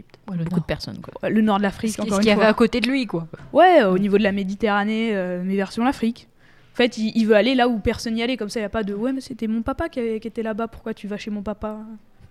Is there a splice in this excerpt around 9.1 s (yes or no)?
yes